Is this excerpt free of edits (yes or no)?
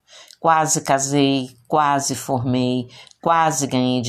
no